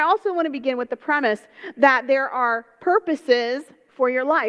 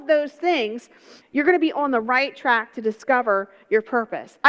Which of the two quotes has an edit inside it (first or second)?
second